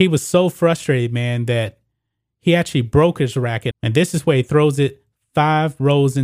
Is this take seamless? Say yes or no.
no